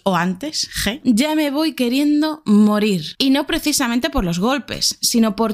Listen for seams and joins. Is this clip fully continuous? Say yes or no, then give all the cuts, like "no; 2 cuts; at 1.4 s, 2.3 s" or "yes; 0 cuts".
no; 1 cut; at 1.0 s